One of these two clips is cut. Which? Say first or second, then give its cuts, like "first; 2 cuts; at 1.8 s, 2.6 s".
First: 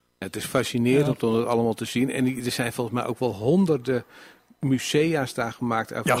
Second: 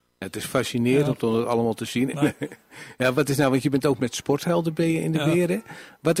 second; 2 cuts; at 2.1 s, 4.0 s